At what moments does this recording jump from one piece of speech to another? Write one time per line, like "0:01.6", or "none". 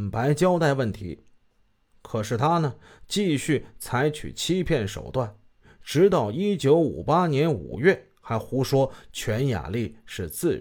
none